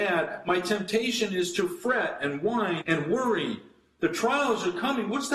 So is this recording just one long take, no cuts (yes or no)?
no